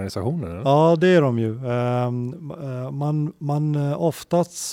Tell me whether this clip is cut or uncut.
uncut